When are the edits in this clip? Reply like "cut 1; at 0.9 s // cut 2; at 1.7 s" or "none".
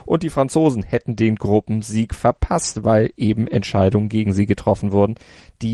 none